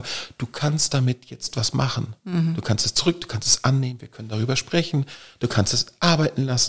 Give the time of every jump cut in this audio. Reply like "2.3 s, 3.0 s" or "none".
none